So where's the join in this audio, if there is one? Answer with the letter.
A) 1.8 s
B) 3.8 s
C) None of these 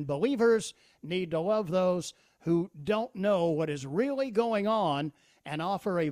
C